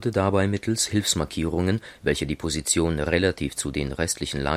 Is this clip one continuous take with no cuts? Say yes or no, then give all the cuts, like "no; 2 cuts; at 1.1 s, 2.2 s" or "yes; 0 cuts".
yes; 0 cuts